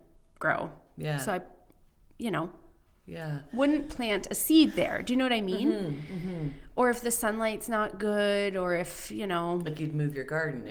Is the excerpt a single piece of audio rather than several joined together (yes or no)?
yes